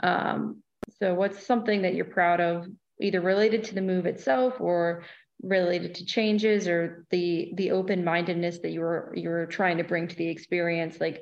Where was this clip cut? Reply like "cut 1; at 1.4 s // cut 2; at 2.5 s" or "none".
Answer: cut 1; at 2.9 s